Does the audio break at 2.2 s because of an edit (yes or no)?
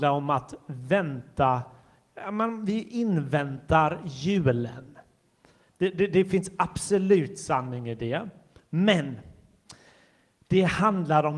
no